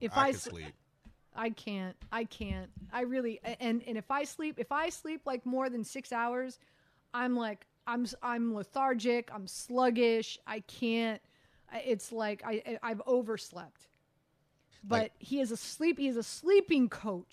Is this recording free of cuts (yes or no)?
yes